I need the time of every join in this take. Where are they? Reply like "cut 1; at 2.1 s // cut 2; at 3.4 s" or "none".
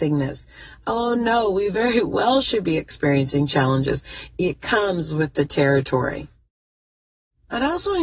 none